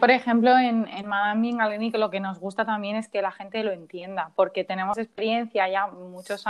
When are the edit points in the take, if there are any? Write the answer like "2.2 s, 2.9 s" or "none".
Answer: 0.9 s